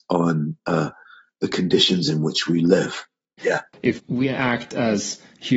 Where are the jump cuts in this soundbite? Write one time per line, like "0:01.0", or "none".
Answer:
0:03.4